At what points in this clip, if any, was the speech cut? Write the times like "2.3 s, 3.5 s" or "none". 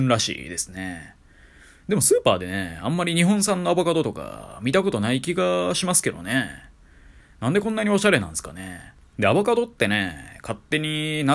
7.2 s, 9.1 s